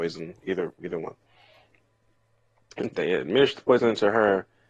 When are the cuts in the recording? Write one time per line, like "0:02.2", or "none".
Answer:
0:02.9